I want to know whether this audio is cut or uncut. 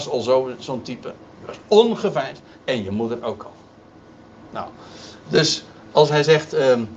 cut